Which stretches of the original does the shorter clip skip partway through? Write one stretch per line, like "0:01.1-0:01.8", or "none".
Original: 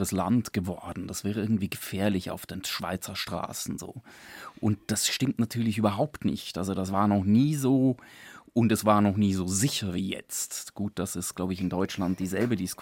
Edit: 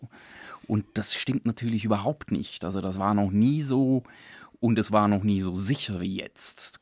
none